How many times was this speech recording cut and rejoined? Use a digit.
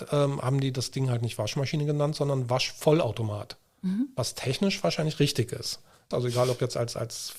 1